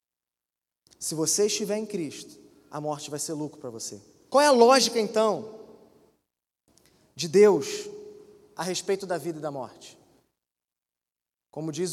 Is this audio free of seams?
no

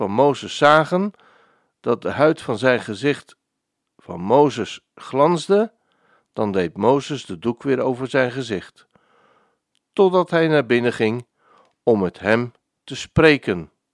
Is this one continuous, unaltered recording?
yes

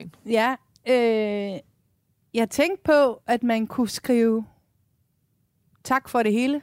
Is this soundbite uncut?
yes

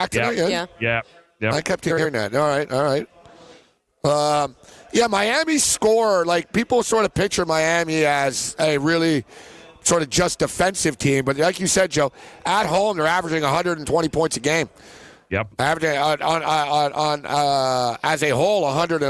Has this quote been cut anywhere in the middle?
no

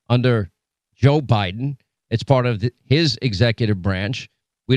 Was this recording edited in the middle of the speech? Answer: no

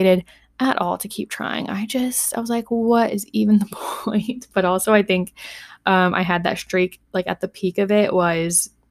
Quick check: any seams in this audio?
no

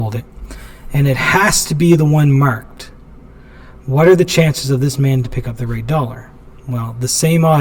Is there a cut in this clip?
no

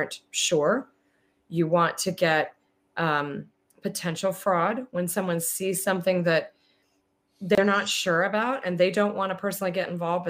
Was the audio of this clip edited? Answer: no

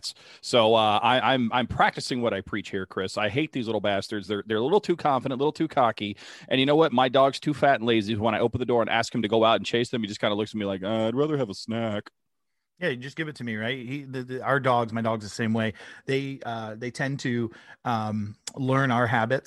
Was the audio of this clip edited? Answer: no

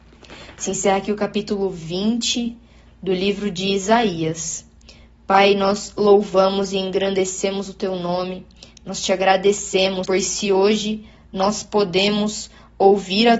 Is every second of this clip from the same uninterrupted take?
no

